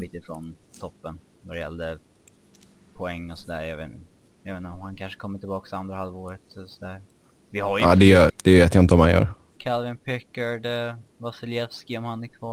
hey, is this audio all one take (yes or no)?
no